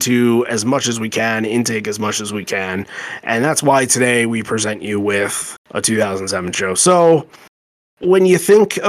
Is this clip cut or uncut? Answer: cut